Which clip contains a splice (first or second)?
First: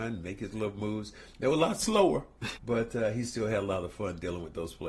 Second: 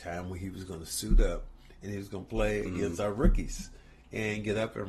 first